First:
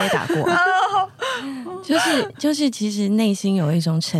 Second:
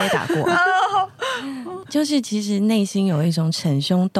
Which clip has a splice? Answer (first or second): second